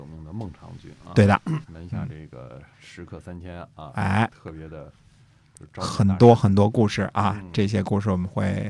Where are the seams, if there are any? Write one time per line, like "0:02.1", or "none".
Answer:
0:01.6
0:02.7